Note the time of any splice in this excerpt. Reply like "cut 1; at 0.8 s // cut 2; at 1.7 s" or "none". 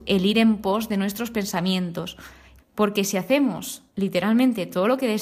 cut 1; at 2.6 s // cut 2; at 3.9 s